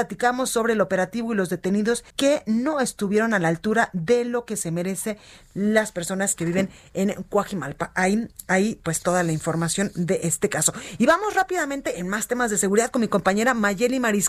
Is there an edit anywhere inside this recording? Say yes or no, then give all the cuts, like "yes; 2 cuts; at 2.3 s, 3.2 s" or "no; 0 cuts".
yes; 1 cut; at 2.1 s